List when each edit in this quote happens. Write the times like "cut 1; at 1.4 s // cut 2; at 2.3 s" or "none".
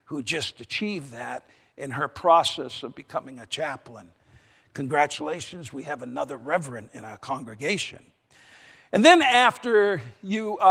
none